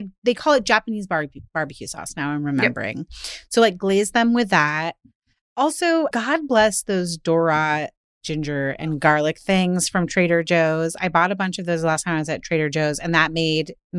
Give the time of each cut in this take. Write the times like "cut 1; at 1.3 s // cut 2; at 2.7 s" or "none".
cut 1; at 6.1 s